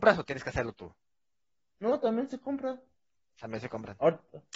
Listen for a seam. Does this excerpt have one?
no; 0 cuts

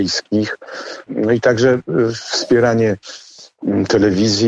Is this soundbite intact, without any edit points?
no; 1 cut; at 1.1 s

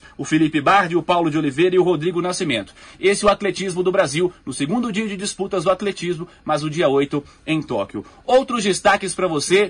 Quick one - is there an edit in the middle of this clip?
no; 0 cuts

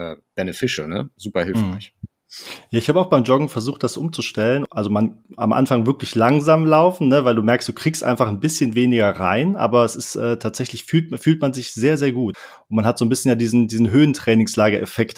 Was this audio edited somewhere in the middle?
no; 0 cuts

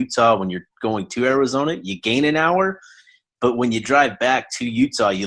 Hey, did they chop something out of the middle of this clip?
no; 0 cuts

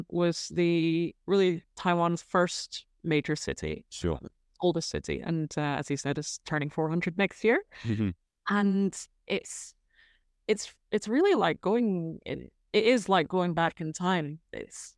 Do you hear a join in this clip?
no; 0 cuts

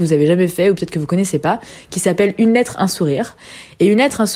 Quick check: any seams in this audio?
no; 0 cuts

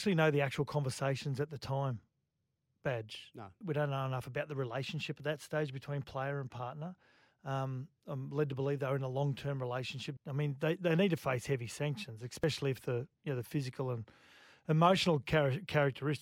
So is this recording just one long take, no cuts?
no; 3 cuts; at 3.6 s, 10.2 s, 13.1 s

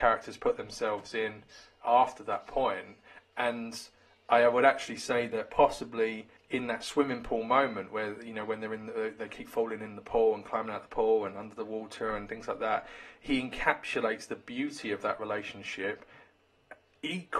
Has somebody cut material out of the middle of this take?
yes; 1 cut; at 6.4 s

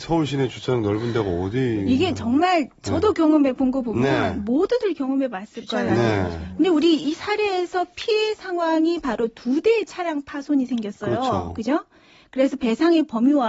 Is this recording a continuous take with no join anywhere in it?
yes; 0 cuts

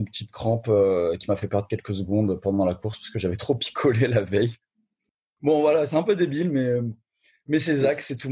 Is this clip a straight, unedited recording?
yes; 0 cuts

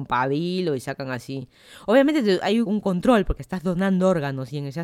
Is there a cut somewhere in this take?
yes; 1 cut; at 2.6 s

